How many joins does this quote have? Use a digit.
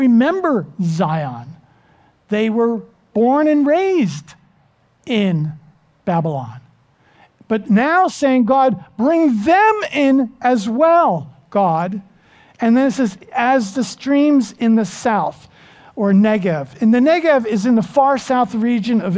0